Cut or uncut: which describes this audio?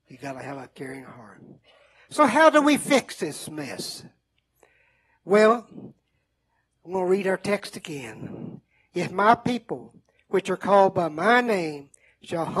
uncut